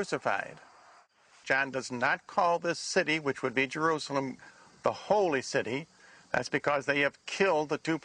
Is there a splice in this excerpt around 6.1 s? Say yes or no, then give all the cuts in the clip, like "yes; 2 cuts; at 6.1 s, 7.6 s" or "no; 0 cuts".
no; 1 cut; at 1.4 s